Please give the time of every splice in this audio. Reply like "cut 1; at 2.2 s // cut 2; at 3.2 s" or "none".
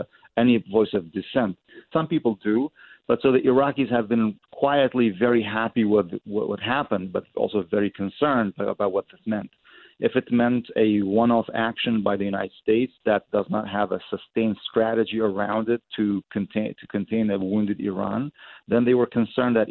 cut 1; at 1.9 s